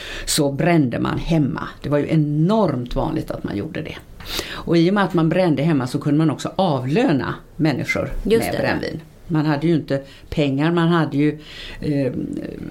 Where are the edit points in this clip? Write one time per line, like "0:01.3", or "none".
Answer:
none